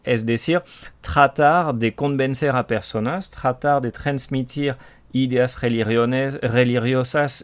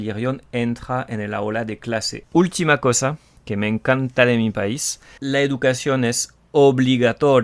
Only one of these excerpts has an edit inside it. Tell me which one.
second; 2 cuts; at 2.2 s, 5.2 s

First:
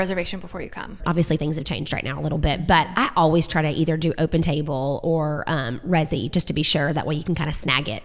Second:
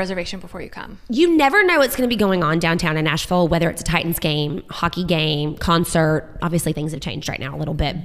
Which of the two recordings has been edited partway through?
first; 1 cut; at 1.0 s

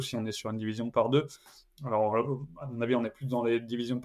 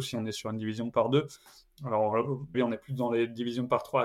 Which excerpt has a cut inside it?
second; 1 cut; at 2.5 s

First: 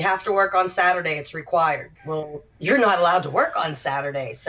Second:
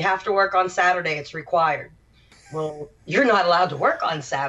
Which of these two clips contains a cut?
first; 1 cut; at 2.0 s

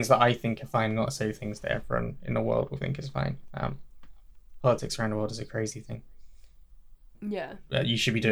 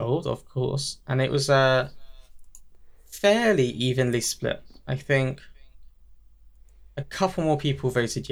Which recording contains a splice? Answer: first; 1 cut; at 7.1 s

